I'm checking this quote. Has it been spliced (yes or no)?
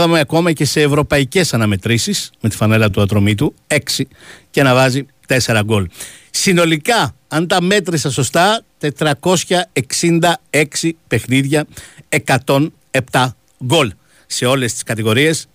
no